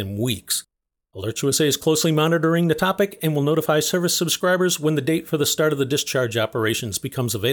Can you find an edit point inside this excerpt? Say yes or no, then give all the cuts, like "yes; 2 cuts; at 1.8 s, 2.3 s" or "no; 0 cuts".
no; 0 cuts